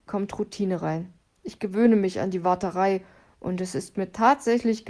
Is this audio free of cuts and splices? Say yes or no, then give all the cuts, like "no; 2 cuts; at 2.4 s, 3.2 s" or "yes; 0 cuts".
yes; 0 cuts